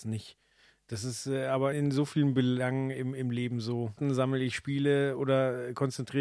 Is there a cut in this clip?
yes; 2 cuts; at 1.7 s, 4.0 s

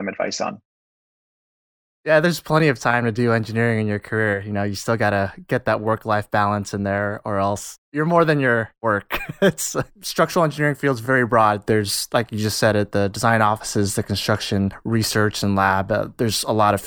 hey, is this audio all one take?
yes; 0 cuts

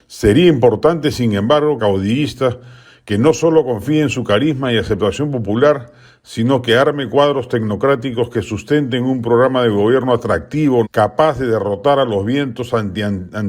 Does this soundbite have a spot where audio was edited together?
yes; 2 cuts; at 1.8 s, 10.8 s

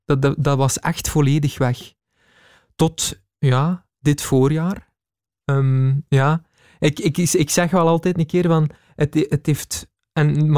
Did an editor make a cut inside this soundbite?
no; 0 cuts

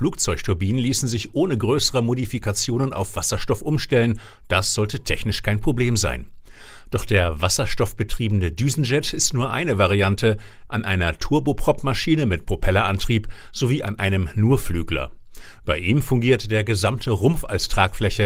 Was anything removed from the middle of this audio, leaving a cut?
yes; 1 cut; at 10.7 s

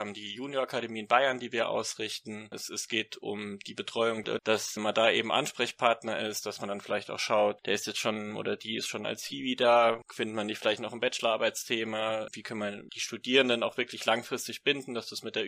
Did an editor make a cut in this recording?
yes; 2 cuts; at 2.5 s, 4.4 s

